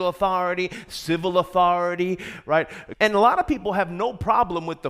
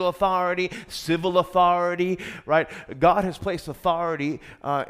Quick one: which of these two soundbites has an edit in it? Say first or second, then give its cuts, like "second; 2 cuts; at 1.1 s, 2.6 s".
first; 1 cut; at 2.9 s